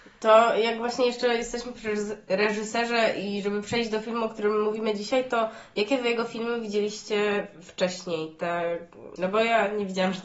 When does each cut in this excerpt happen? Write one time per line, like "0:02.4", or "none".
0:09.2